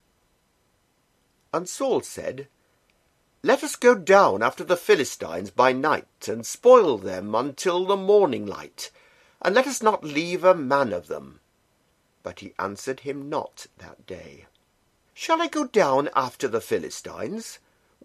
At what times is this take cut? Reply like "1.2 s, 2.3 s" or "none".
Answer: 12.0 s, 15.1 s